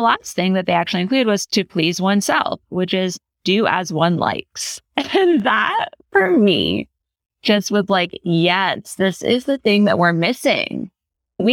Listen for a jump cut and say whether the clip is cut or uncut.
uncut